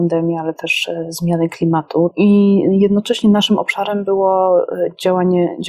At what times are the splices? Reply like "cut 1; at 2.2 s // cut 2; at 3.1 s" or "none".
cut 1; at 2.1 s